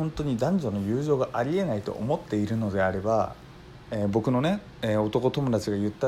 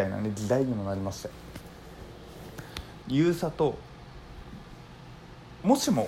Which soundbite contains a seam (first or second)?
second